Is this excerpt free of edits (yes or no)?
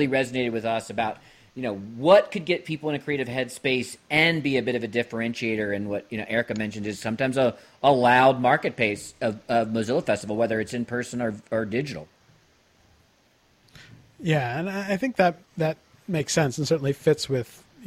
yes